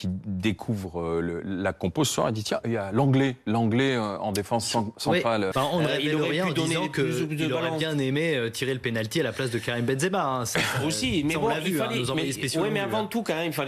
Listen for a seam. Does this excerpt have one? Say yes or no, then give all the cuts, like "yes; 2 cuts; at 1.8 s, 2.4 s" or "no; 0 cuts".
yes; 1 cut; at 5.5 s